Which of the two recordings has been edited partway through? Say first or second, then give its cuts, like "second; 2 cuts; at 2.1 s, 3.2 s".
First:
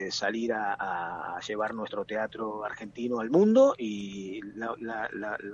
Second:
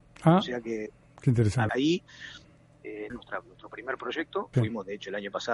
second; 3 cuts; at 1.7 s, 3.1 s, 4.5 s